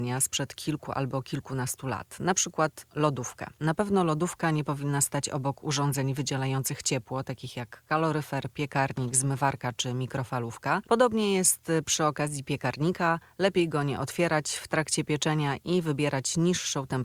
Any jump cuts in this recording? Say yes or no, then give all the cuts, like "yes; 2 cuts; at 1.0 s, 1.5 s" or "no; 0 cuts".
yes; 2 cuts; at 3.6 s, 10.8 s